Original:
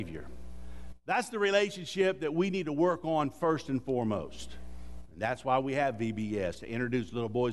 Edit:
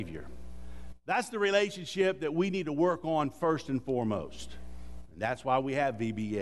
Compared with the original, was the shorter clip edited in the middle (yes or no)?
no